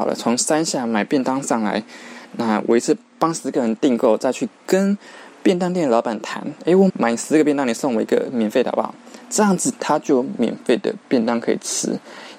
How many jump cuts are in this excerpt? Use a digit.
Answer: 1